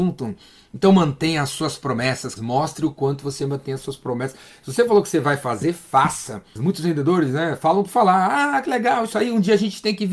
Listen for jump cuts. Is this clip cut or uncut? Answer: cut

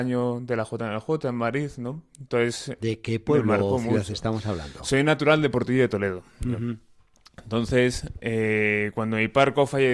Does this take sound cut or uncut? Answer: uncut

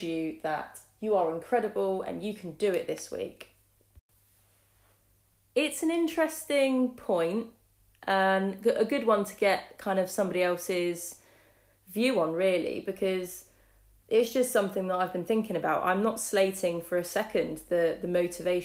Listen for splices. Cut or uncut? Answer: uncut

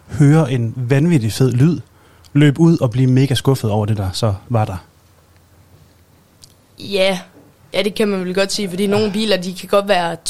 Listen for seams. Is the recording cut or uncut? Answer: uncut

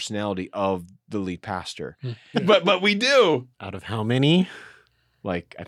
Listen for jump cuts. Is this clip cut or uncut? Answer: cut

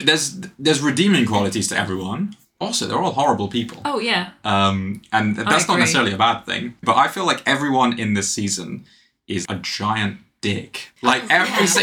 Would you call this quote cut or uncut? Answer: cut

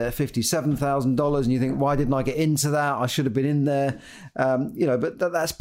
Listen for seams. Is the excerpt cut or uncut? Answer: uncut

